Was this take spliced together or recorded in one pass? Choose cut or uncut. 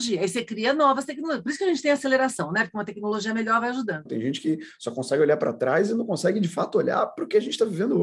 cut